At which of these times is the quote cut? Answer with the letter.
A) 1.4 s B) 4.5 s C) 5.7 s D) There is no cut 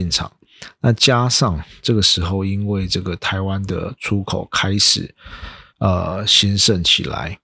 C